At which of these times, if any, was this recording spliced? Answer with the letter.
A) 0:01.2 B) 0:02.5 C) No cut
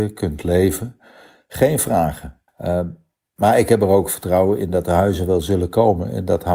B